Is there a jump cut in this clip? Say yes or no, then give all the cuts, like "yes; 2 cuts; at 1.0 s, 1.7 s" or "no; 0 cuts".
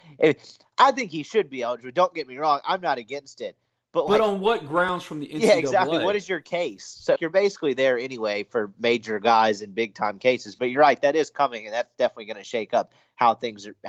yes; 1 cut; at 7.2 s